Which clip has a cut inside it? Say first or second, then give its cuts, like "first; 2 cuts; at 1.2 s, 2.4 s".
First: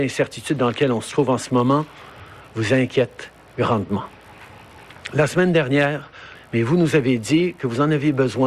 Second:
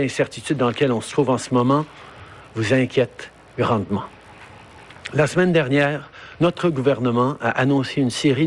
first; 1 cut; at 6.3 s